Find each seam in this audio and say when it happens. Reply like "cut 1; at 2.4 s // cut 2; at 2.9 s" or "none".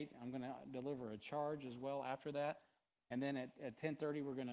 none